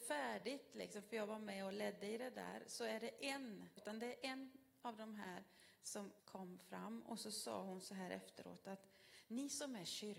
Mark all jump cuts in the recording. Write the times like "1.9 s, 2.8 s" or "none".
3.8 s, 6.2 s